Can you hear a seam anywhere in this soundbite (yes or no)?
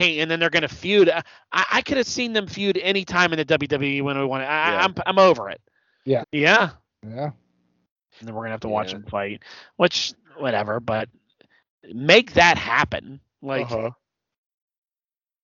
yes